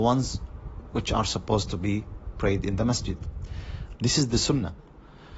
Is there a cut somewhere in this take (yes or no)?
yes